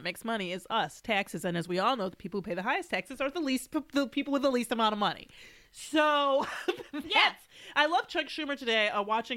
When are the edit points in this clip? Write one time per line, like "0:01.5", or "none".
none